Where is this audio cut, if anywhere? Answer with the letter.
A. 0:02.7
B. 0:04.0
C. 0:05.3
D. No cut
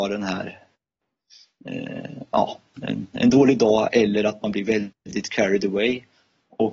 D